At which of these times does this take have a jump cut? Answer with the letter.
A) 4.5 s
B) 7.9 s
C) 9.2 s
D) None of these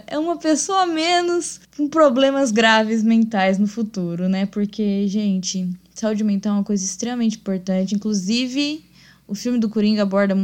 D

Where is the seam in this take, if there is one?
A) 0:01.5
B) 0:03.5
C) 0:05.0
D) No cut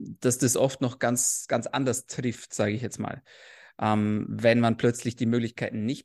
D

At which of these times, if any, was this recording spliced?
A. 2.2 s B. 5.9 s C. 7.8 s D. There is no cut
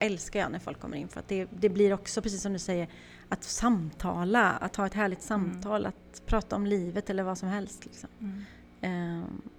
D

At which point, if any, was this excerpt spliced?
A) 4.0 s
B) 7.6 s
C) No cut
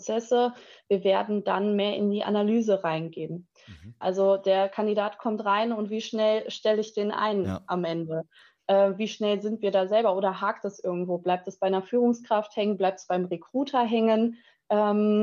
A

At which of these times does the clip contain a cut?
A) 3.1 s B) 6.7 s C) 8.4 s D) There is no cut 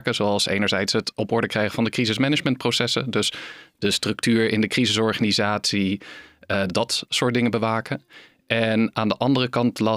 B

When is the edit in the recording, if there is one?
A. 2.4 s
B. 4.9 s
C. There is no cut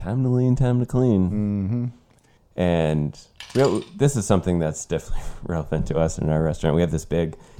A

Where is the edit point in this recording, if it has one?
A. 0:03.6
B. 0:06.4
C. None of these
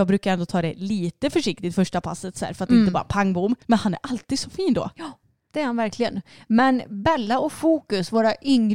A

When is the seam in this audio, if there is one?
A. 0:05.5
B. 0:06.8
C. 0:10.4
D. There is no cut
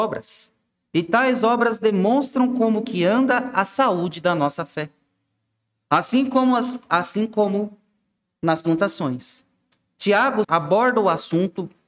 C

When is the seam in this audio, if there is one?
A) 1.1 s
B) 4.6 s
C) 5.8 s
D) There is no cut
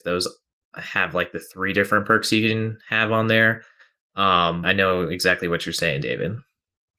B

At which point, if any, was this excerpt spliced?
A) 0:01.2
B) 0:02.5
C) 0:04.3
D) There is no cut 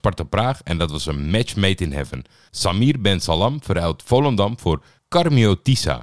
B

